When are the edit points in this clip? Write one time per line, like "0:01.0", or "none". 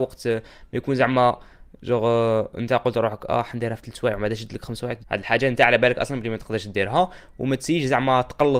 0:05.0